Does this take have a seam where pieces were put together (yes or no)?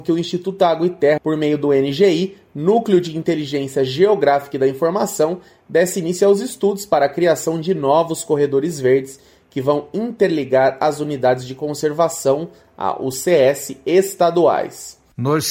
yes